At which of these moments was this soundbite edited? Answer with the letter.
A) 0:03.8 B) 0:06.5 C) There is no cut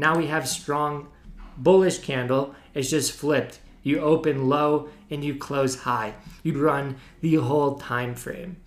B